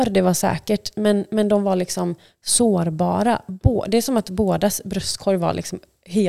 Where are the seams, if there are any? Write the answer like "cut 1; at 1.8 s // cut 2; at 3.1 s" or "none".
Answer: none